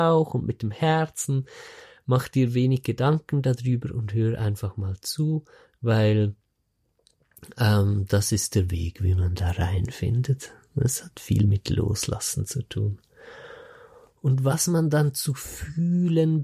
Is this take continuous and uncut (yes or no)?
yes